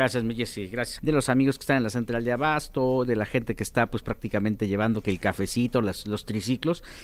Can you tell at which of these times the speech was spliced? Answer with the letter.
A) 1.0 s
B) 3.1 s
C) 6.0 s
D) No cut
A